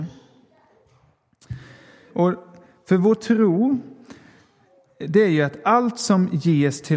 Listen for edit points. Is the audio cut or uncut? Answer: cut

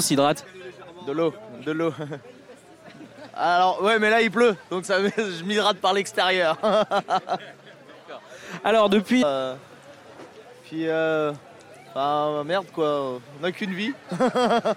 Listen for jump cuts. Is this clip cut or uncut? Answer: cut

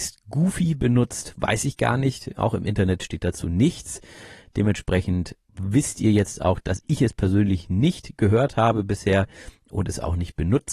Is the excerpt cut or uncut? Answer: uncut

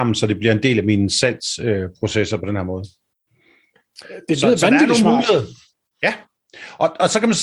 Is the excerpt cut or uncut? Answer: uncut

